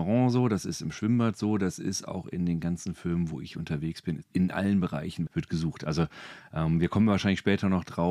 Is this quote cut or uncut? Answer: cut